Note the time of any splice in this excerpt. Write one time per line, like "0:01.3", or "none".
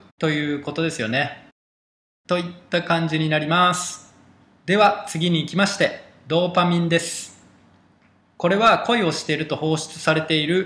none